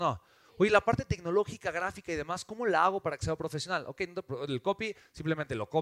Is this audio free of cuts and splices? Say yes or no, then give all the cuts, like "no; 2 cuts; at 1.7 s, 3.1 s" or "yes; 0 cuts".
yes; 0 cuts